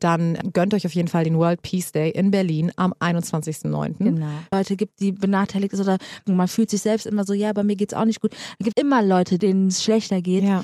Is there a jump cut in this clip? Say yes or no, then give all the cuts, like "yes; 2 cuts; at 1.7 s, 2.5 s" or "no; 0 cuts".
yes; 2 cuts; at 4.5 s, 8.7 s